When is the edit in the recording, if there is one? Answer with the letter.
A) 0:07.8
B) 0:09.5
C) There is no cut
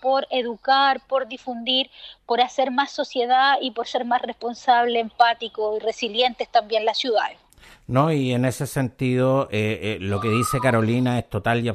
C